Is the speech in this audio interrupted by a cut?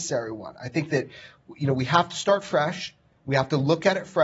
no; 0 cuts

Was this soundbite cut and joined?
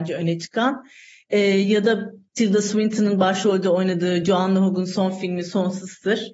no; 0 cuts

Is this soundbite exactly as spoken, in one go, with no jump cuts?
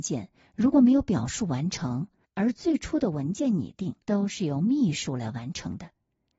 no; 2 cuts; at 2.2 s, 4.0 s

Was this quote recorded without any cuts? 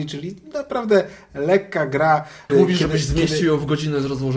no; 1 cut; at 2.5 s

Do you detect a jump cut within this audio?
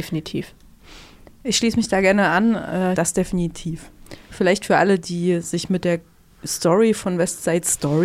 yes; 1 cut; at 2.9 s

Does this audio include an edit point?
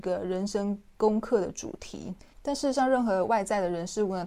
yes; 1 cut; at 2.3 s

